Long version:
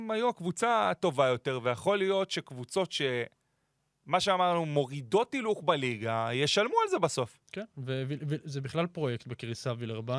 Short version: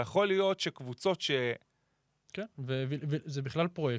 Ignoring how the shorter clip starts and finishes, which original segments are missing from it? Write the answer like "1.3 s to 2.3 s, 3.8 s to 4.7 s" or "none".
4.0 s to 7.4 s